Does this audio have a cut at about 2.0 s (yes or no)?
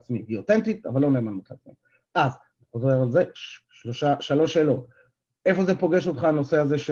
no